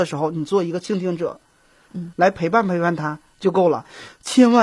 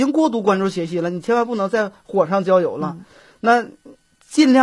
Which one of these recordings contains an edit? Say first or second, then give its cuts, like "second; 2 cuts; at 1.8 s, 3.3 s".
first; 1 cut; at 1.9 s